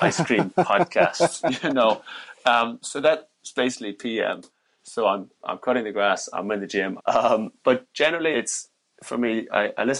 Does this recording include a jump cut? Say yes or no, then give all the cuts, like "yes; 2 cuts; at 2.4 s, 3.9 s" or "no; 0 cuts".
yes; 2 cuts; at 7.0 s, 8.3 s